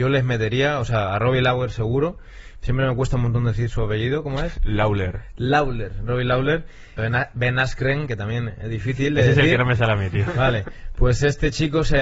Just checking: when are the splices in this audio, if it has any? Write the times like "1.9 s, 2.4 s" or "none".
7.0 s